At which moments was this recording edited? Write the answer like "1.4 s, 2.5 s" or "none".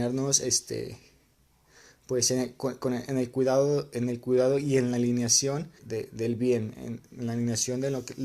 5.8 s